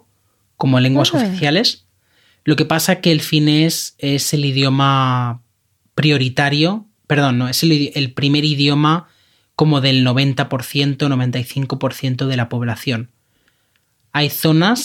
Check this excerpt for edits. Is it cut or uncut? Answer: uncut